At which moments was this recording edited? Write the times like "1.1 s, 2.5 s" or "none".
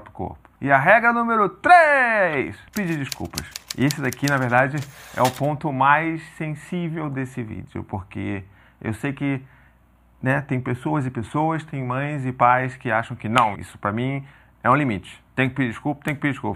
13.5 s